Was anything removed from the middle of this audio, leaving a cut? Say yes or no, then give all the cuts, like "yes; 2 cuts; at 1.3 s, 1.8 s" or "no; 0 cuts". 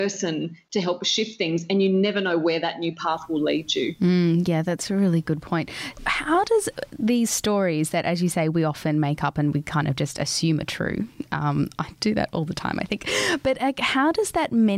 yes; 1 cut; at 6.0 s